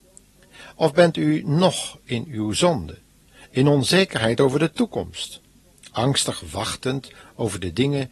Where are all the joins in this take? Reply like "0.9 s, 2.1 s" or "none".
none